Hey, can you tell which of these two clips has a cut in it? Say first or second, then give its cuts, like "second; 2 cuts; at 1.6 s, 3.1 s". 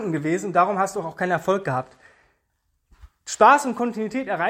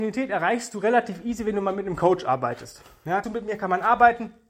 second; 1 cut; at 3.2 s